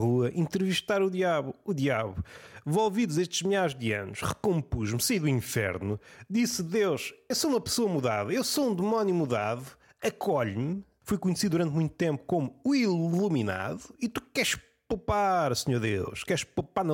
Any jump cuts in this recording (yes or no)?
no